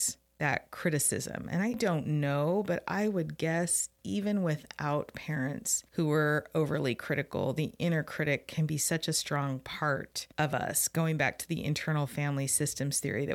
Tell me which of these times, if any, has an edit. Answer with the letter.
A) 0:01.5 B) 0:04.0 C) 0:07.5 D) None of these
D